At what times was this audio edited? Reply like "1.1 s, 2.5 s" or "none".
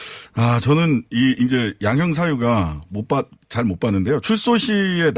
none